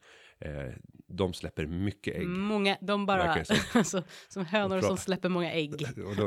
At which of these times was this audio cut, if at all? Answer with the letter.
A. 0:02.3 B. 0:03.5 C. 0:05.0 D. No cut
D